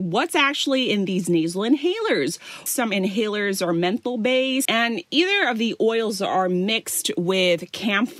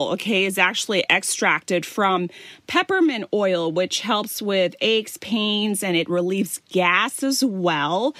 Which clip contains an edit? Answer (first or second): first